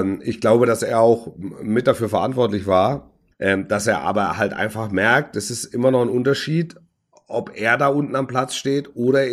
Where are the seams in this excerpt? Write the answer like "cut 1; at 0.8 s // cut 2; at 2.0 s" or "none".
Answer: cut 1; at 3.3 s